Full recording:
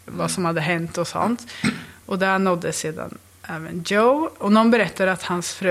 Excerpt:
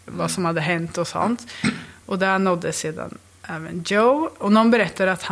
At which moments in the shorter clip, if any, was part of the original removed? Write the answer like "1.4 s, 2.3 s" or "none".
none